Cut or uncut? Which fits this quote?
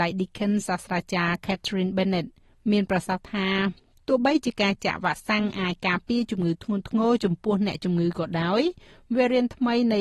uncut